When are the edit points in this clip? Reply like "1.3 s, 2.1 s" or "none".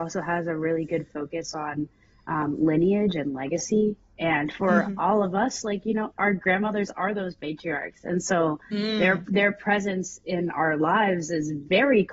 none